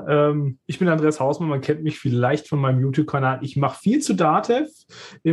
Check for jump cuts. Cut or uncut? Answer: uncut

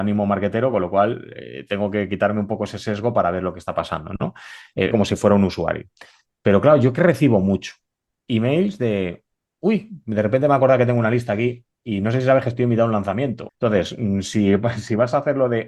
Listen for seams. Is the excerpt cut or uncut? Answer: cut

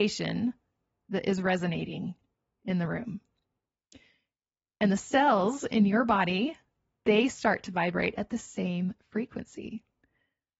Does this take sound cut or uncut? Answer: uncut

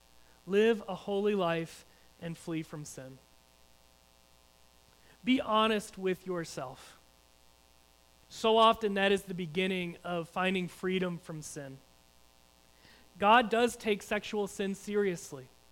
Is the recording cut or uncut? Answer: uncut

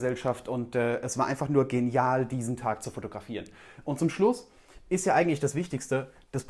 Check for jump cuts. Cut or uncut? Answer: uncut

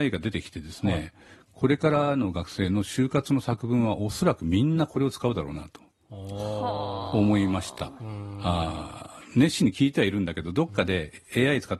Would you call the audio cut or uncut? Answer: uncut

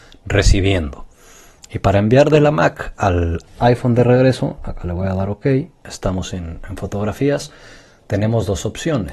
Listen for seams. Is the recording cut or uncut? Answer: uncut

